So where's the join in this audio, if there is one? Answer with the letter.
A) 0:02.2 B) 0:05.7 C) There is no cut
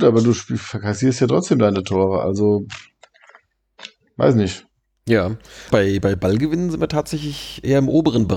B